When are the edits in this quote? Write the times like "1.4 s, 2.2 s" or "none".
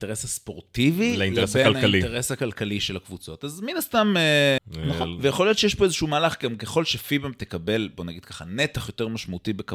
4.6 s